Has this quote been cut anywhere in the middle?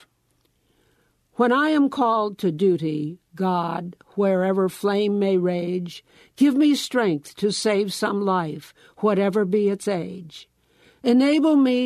no; 0 cuts

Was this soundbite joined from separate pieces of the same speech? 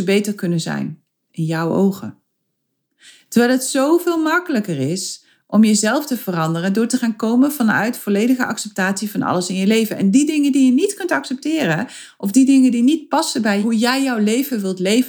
no; 0 cuts

